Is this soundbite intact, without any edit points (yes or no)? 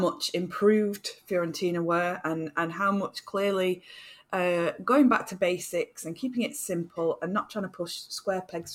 yes